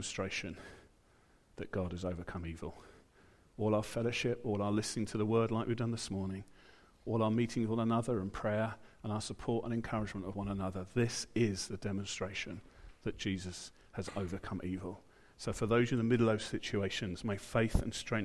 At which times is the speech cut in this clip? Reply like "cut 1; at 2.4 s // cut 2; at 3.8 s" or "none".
cut 1; at 4.4 s // cut 2; at 15.3 s